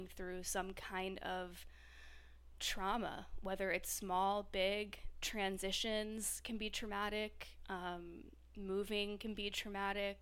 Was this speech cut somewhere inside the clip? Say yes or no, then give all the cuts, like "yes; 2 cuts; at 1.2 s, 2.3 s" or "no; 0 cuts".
no; 0 cuts